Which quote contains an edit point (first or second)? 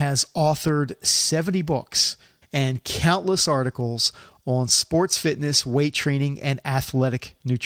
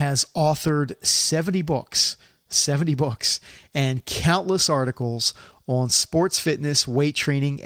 first